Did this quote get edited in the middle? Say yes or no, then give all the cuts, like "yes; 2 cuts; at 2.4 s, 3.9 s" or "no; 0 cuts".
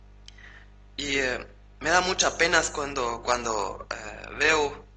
no; 0 cuts